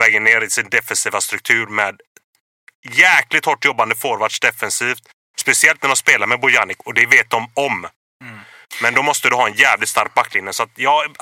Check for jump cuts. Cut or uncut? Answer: cut